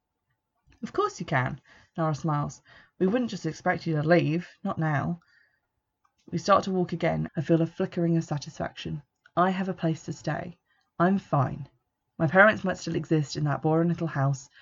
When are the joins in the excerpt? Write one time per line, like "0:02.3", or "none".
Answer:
0:07.3